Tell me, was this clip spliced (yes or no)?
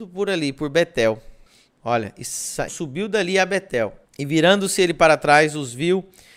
yes